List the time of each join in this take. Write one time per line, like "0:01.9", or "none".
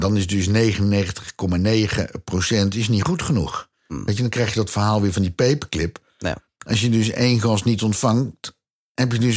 none